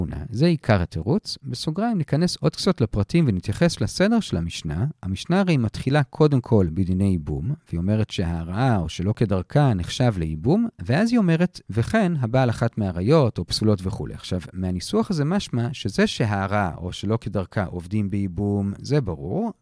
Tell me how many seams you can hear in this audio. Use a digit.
0